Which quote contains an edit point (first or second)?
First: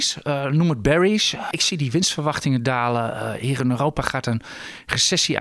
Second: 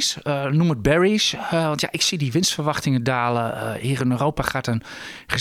first